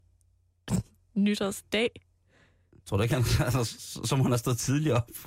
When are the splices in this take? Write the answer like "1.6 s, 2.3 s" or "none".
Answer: 2.8 s